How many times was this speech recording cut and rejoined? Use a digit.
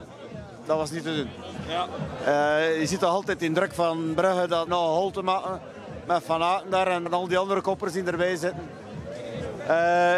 2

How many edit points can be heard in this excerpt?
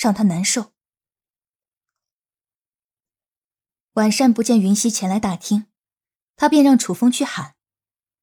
0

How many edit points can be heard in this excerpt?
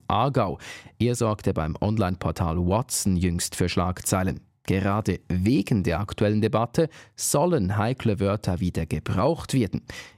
0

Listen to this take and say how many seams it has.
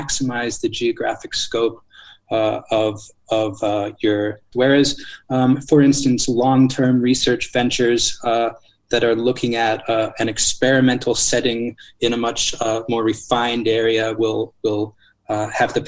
1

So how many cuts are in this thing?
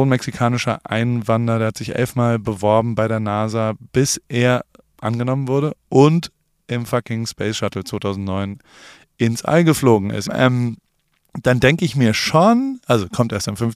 1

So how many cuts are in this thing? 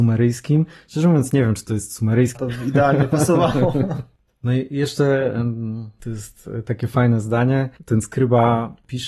1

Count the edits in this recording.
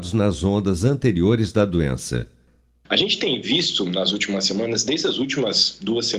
0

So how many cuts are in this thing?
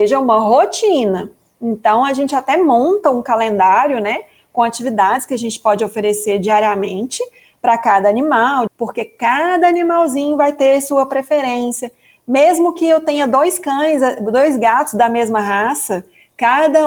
1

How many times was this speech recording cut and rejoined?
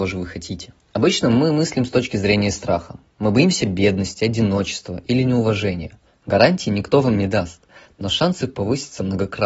1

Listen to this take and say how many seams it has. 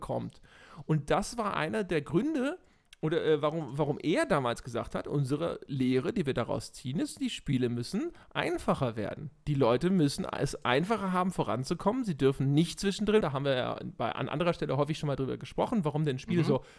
1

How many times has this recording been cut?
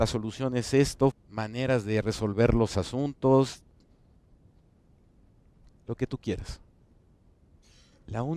1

